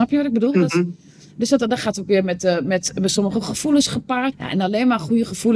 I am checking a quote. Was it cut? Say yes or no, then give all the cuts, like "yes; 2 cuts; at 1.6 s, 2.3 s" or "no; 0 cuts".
yes; 1 cut; at 4.3 s